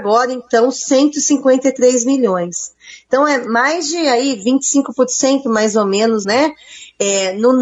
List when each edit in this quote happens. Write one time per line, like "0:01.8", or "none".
0:06.2